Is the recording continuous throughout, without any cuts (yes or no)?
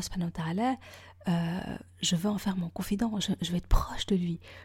yes